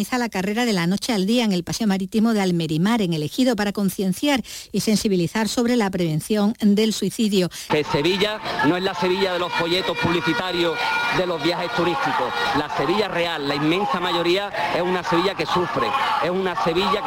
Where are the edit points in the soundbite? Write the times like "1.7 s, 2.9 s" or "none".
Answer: 7.7 s